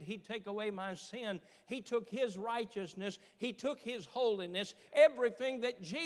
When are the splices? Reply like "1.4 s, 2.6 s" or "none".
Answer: 4.9 s